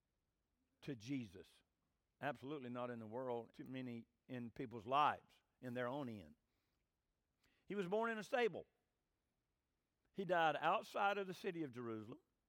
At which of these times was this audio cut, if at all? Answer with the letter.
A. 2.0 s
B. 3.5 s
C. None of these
B